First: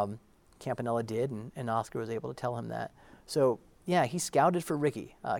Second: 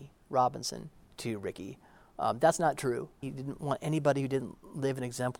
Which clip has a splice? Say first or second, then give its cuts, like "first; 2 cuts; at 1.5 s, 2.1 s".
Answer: second; 1 cut; at 3.2 s